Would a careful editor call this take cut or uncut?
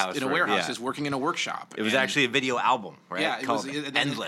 uncut